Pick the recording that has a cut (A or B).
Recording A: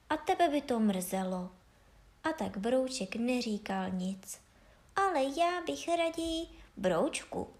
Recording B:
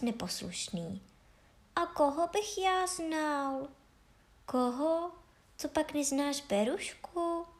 A